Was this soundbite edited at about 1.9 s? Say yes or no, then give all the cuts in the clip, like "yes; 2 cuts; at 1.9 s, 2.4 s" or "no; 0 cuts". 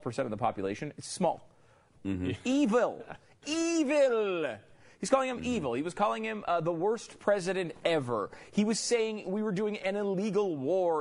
yes; 1 cut; at 1.9 s